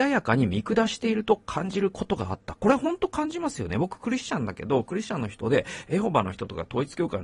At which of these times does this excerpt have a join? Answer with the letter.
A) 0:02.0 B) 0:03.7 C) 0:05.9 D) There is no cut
D